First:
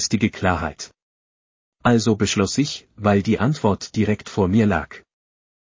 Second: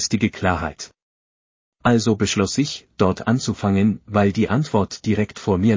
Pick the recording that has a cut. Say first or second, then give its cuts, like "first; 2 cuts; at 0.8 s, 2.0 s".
first; 1 cut; at 2.9 s